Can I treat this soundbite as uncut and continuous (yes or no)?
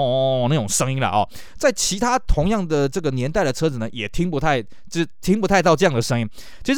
yes